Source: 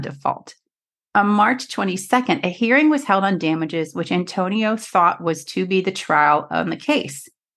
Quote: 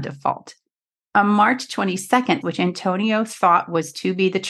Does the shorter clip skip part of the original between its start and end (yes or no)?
yes